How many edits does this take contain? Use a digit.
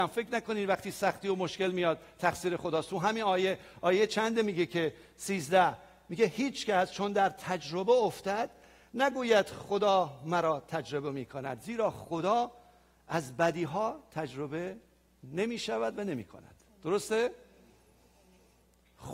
0